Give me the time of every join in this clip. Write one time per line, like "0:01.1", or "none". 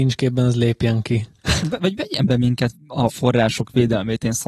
0:01.6
0:02.7